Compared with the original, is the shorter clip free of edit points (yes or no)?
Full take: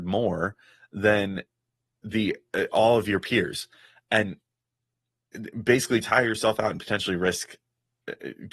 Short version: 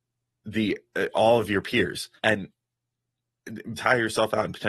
no